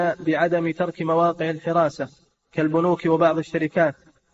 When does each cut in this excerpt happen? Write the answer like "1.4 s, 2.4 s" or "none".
none